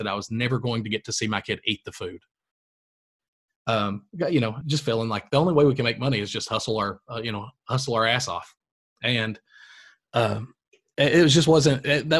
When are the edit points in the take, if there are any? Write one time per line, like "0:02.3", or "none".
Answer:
0:04.6